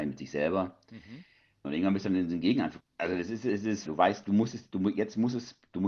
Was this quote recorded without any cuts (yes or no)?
no